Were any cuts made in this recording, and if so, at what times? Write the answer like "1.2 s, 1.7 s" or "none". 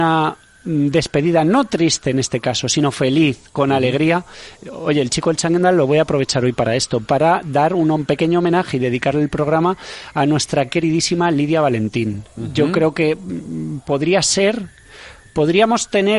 none